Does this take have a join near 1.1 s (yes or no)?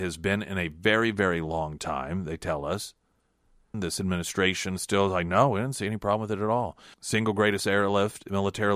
no